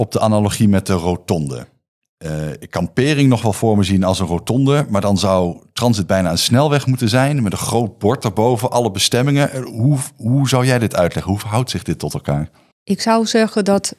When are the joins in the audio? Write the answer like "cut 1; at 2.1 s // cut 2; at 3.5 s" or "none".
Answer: none